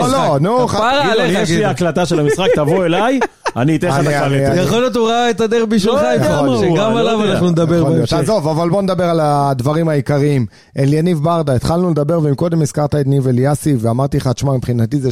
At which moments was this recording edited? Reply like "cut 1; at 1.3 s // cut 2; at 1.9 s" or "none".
none

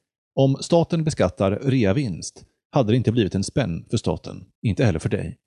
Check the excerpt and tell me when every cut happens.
cut 1; at 4.5 s

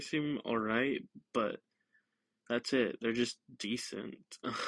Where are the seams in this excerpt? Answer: none

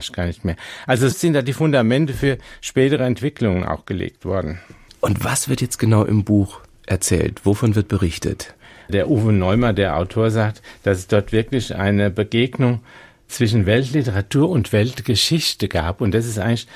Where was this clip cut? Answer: cut 1; at 1.1 s

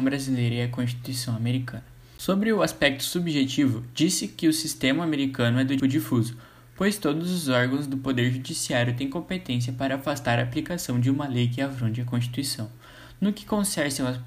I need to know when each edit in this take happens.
cut 1; at 5.8 s

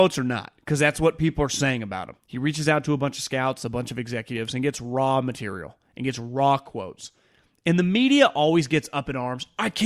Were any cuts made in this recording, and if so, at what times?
cut 1; at 2.2 s

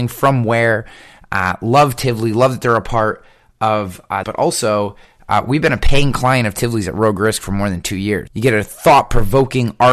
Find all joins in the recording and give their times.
cut 1; at 4.2 s // cut 2; at 8.3 s

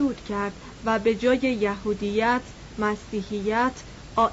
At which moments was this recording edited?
none

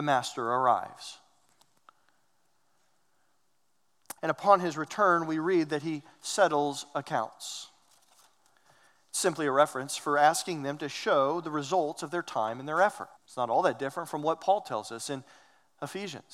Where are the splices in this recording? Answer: cut 1; at 4.2 s // cut 2; at 13.2 s

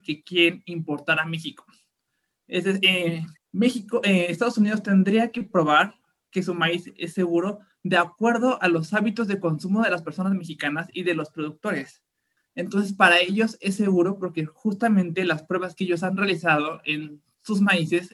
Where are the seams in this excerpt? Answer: cut 1; at 3.4 s // cut 2; at 12.4 s

